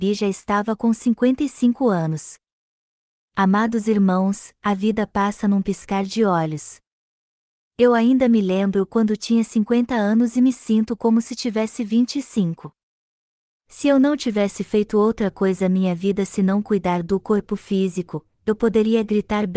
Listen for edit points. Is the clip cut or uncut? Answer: uncut